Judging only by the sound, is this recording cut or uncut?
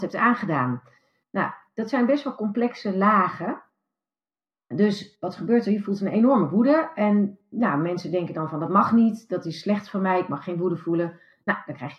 uncut